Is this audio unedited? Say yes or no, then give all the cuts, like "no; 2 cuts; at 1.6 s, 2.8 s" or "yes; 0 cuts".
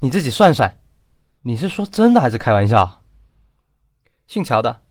no; 1 cut; at 1.4 s